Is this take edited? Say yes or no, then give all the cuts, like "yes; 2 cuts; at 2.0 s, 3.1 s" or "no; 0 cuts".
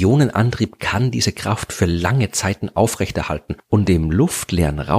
no; 0 cuts